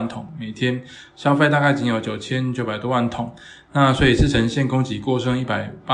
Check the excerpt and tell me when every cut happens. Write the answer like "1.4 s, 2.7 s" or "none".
none